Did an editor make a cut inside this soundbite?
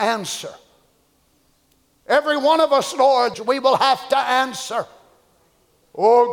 yes; 1 cut; at 3.3 s

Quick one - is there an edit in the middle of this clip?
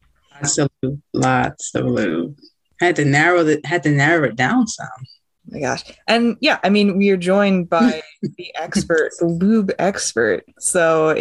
no; 0 cuts

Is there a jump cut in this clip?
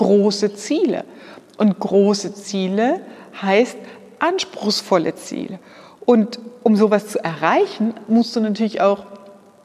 no; 0 cuts

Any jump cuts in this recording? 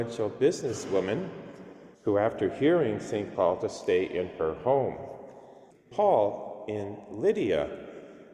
yes; 3 cuts; at 1.9 s, 3.4 s, 5.9 s

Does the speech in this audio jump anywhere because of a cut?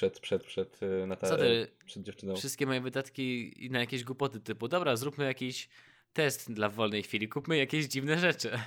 no; 0 cuts

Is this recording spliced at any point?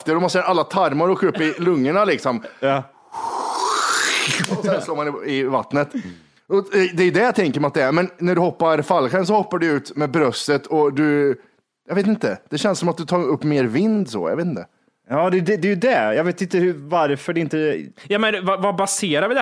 no; 0 cuts

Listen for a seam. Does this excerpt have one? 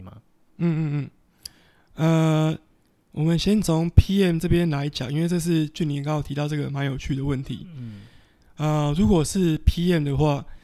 no; 0 cuts

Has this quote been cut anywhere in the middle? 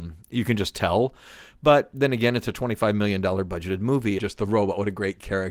yes; 1 cut; at 4.2 s

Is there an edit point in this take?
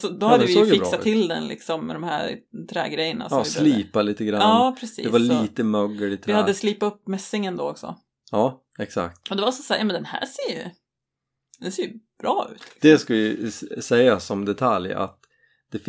no; 0 cuts

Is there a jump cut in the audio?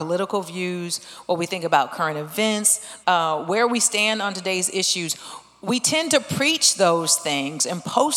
yes; 1 cut; at 3.0 s

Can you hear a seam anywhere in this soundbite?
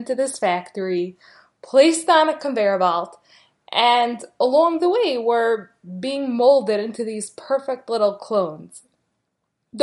no; 0 cuts

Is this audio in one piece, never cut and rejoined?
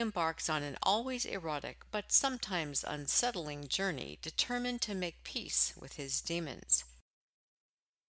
yes; 0 cuts

